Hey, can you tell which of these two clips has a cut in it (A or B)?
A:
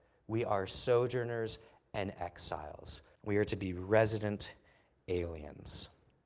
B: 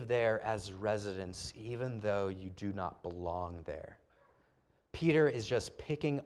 A